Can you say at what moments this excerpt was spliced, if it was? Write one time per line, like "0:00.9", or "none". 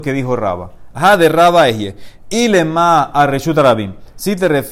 0:00.9